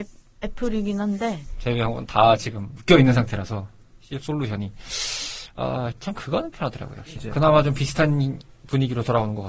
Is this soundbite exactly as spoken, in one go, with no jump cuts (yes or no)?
no